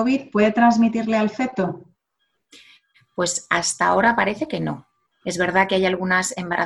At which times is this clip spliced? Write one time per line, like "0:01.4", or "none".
0:05.2